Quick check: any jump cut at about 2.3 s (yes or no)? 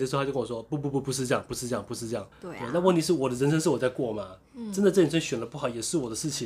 yes